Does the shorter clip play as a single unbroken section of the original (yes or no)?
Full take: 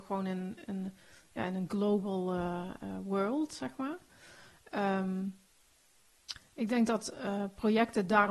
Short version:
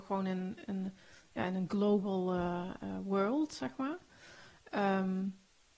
yes